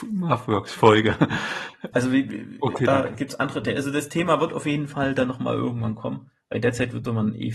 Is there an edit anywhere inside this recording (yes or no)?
yes